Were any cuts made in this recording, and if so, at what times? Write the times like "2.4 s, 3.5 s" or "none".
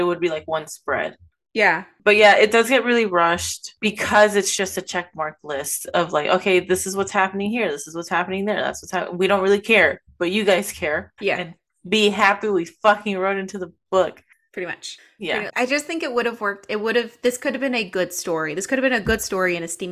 11.2 s, 15.5 s